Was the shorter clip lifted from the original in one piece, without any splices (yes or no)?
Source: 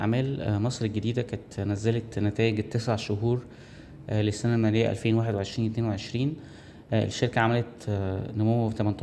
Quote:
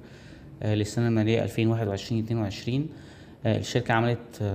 yes